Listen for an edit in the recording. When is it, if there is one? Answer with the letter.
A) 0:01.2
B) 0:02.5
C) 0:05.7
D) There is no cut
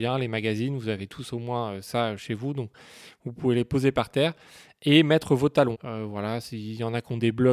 C